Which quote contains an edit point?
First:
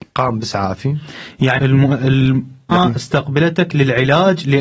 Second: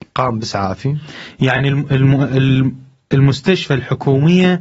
first; 2 cuts; at 1.6 s, 2.7 s

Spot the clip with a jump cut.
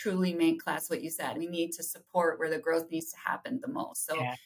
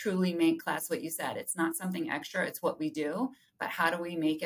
first; 1 cut; at 1.3 s

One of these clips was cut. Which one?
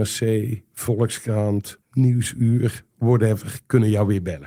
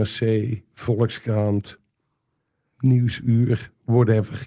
first; 1 cut; at 1.8 s

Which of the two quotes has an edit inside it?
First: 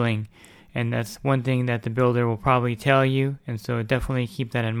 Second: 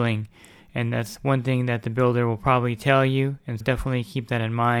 second; 1 cut; at 3.6 s

